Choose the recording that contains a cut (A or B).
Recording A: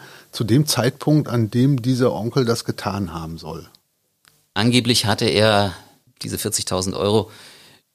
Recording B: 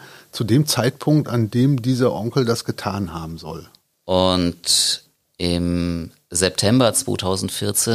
B